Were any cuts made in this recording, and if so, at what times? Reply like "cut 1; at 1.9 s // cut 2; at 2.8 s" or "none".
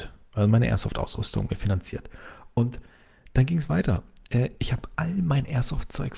none